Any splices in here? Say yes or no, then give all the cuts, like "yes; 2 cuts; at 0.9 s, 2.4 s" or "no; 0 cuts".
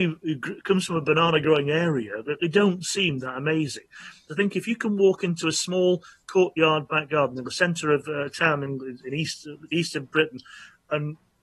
yes; 1 cut; at 4.3 s